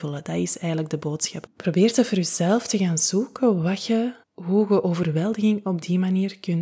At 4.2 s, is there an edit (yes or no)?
yes